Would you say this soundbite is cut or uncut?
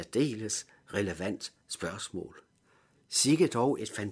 cut